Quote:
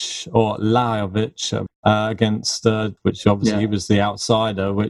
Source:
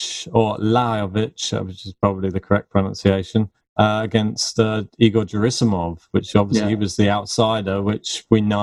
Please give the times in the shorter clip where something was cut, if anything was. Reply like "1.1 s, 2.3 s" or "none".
1.7 s, 3.0 s

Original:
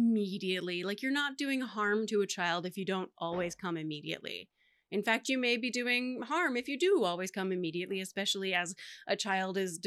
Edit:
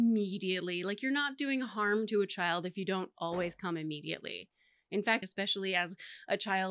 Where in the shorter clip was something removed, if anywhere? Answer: 5.2 s

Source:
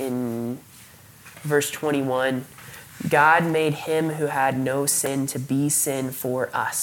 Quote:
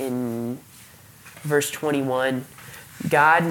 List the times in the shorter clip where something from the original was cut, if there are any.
none

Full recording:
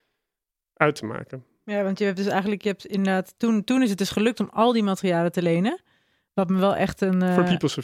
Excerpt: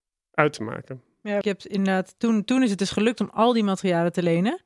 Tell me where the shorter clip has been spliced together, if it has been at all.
1.4 s

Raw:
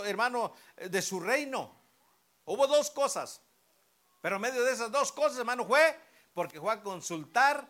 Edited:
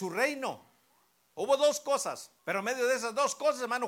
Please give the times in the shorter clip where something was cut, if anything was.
2.4 s

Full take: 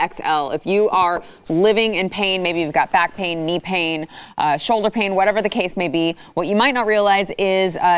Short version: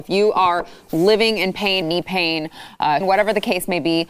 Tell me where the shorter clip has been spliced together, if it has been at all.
1.8 s, 3.0 s

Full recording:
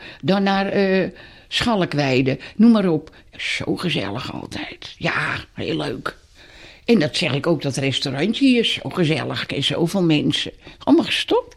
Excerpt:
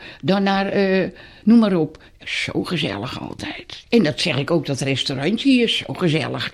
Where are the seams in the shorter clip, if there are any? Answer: 1.4 s, 3.8 s

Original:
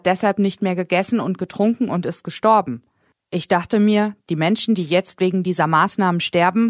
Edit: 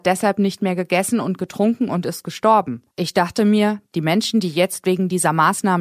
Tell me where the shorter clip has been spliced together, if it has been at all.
2.9 s

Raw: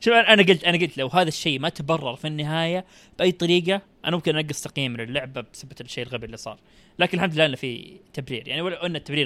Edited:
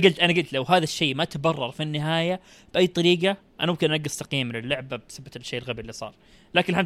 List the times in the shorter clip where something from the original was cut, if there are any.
none

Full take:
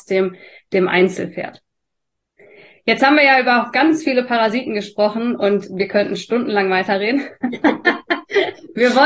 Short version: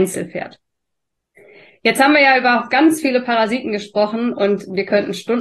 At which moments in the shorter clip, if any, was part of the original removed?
none

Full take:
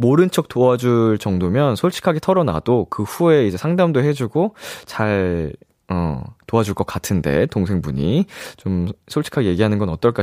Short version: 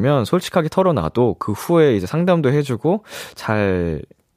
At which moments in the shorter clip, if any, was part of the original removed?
none

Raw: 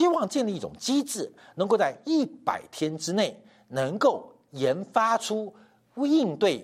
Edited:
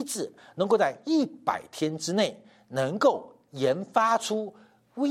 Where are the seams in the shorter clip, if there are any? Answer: none

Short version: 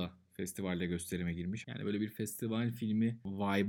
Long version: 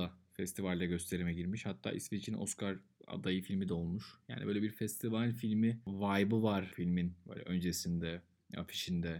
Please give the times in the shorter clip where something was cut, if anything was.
1.6 s

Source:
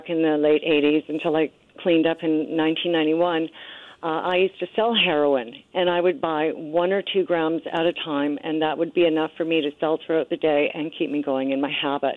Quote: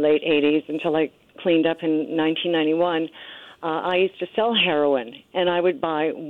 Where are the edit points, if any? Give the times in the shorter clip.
none

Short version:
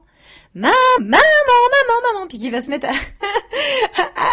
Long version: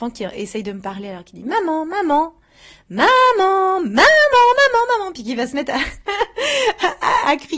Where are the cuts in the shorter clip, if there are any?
1.0 s

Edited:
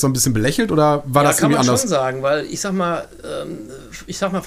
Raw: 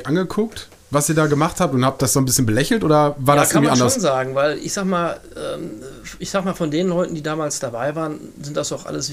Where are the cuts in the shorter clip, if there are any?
none

